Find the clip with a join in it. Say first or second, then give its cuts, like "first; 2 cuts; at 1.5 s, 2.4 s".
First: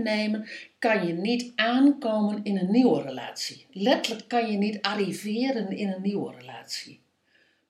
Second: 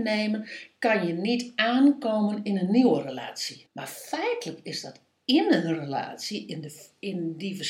second; 1 cut; at 3.7 s